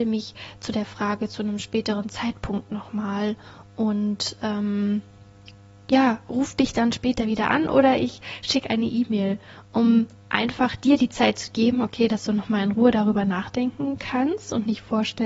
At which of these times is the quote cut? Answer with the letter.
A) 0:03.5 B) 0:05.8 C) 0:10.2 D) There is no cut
D